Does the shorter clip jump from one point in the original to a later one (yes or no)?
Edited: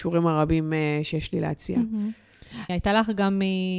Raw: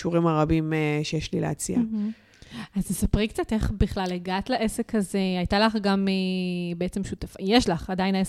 yes